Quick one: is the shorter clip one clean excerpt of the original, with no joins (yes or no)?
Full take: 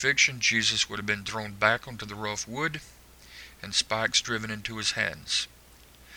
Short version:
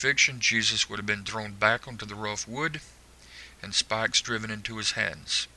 yes